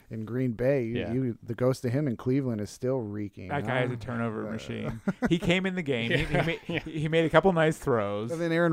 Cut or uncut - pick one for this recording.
uncut